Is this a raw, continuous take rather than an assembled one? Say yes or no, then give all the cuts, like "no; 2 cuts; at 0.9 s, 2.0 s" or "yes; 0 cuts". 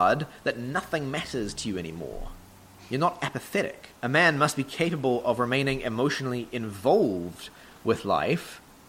no; 1 cut; at 4.0 s